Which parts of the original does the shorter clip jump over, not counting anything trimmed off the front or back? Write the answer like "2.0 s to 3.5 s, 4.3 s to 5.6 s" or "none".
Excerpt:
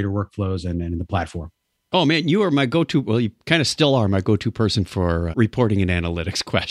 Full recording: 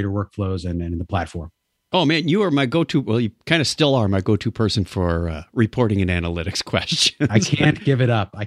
5.3 s to 5.5 s